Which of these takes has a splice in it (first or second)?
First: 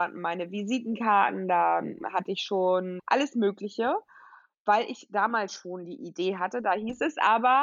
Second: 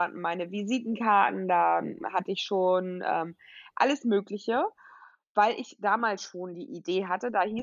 first